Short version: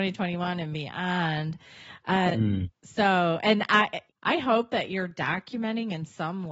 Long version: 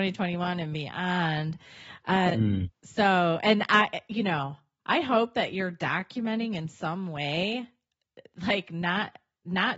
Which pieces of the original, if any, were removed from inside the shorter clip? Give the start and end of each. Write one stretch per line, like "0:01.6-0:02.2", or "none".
0:04.1-0:04.7